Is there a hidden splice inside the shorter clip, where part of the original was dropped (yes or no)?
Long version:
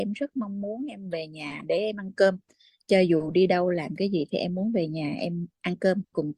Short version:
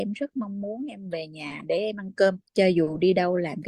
yes